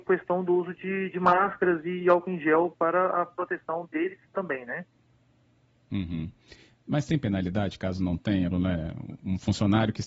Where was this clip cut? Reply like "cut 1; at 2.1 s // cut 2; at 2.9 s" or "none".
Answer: cut 1; at 8.5 s